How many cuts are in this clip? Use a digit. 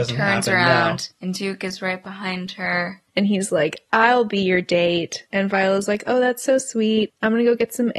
1